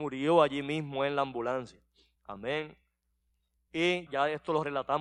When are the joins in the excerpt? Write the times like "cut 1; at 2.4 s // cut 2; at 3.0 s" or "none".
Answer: cut 1; at 4.1 s